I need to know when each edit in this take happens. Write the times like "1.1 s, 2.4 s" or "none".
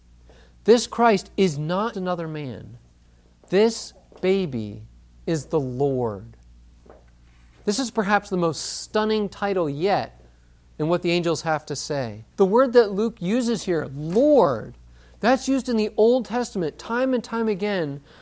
1.9 s, 12.3 s